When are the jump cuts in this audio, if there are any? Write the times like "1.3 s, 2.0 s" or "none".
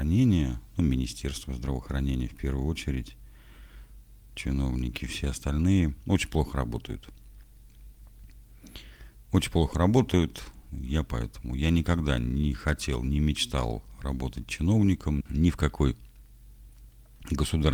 15.2 s